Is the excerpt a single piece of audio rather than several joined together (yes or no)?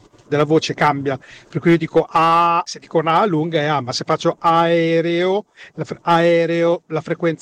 yes